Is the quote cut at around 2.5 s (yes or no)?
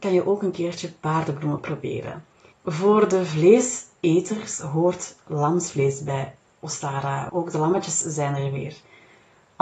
yes